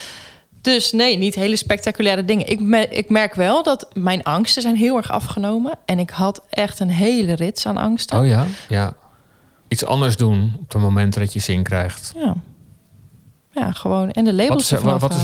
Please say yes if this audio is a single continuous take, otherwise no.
no